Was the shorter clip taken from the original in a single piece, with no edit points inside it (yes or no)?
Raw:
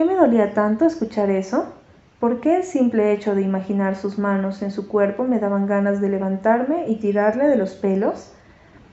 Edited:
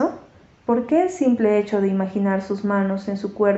yes